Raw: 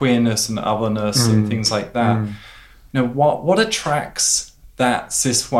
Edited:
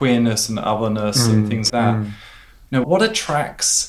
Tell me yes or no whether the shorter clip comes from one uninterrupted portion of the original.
no